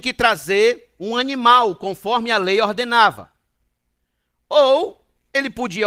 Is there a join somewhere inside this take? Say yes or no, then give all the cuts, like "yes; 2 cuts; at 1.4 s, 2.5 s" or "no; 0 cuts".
no; 0 cuts